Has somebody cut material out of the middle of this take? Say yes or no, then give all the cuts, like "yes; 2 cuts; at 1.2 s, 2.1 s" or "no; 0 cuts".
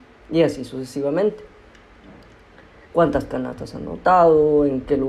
yes; 1 cut; at 2.9 s